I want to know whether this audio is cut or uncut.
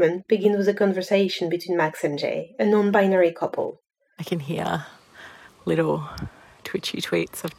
cut